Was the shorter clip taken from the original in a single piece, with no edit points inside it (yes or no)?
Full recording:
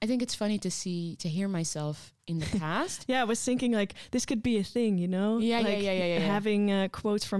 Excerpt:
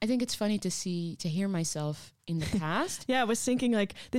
yes